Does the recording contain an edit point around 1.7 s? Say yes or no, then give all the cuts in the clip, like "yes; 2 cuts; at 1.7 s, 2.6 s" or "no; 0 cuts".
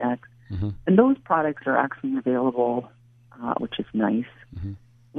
no; 1 cut; at 3.6 s